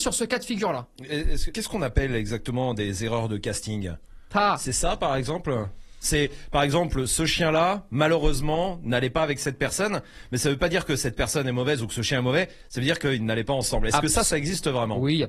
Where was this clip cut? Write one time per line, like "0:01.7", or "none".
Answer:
0:01.5